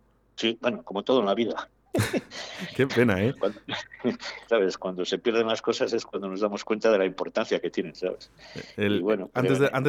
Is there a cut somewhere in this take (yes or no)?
yes